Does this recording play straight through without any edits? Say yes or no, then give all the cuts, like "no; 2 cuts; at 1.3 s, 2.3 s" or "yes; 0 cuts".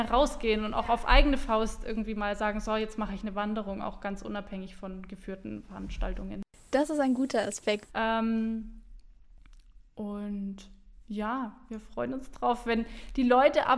no; 1 cut; at 7.9 s